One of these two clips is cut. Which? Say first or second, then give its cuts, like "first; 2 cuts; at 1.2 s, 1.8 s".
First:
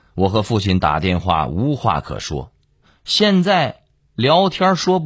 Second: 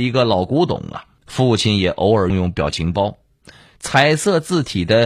second; 2 cuts; at 1.2 s, 2.3 s